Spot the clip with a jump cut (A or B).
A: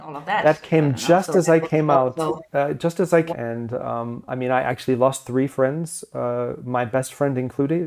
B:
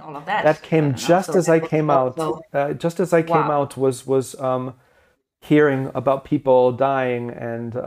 A